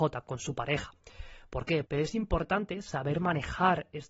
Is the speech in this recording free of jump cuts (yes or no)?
no